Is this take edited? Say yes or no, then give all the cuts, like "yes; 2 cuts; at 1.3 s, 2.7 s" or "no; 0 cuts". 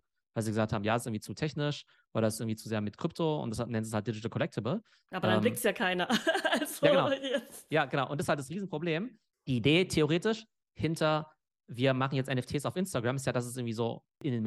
no; 0 cuts